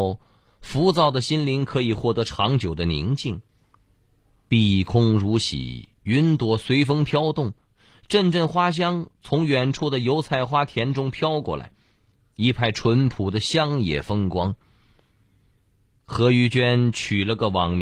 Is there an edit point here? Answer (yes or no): no